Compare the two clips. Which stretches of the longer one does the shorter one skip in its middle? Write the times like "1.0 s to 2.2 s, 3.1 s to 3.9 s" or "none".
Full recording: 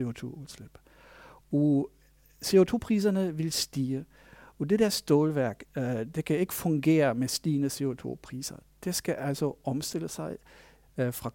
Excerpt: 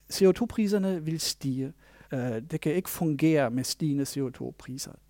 4.4 s to 5.7 s